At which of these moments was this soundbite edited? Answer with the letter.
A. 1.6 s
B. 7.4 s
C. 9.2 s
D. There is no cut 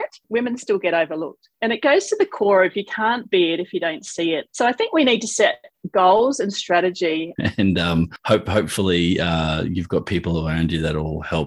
B